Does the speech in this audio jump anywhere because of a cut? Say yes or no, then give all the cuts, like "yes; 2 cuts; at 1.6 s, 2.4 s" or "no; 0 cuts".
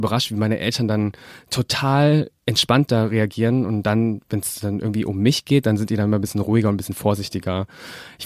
yes; 1 cut; at 2.4 s